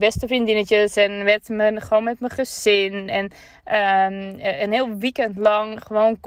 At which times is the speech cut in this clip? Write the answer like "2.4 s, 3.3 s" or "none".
none